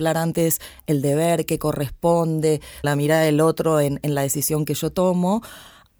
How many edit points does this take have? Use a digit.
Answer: 1